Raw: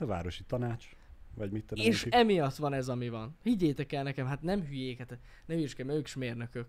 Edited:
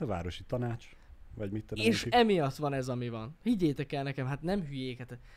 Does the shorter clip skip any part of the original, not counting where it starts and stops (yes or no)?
no